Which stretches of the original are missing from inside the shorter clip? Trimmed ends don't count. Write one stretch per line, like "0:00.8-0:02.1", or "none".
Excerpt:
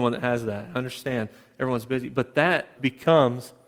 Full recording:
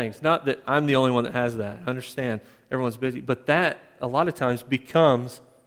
0:03.9-0:04.6